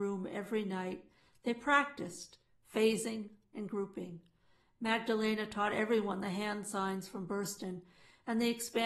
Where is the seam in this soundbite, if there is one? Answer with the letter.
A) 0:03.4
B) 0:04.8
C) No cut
A